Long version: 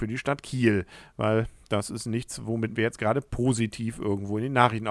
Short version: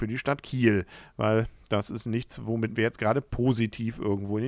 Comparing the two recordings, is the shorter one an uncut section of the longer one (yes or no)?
yes